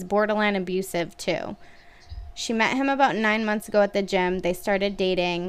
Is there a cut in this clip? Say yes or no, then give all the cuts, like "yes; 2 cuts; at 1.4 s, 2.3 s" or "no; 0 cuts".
no; 0 cuts